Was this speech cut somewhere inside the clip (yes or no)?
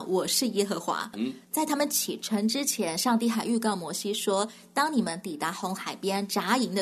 yes